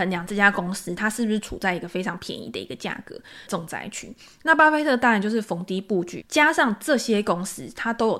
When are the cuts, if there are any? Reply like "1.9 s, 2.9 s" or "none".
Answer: 3.5 s, 6.2 s